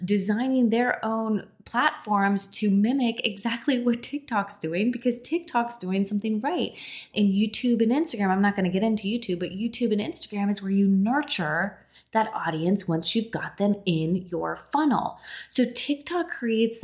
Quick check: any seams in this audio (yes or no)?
yes